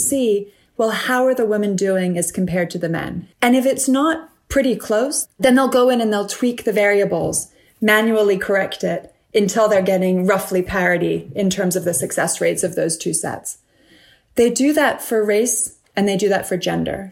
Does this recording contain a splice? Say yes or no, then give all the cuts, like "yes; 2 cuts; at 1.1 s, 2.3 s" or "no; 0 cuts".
yes; 1 cut; at 3.3 s